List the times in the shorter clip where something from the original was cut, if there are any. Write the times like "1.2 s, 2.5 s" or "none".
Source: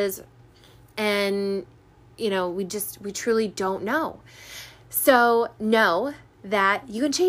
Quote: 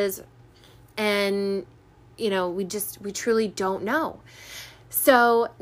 none